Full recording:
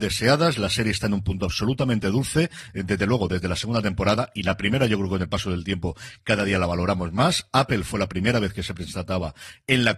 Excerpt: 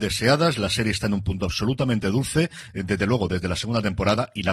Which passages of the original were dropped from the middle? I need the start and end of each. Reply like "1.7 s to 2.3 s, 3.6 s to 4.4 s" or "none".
none